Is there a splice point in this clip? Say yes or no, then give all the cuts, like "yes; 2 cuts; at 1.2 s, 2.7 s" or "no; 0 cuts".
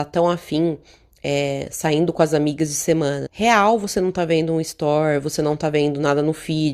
yes; 1 cut; at 3.3 s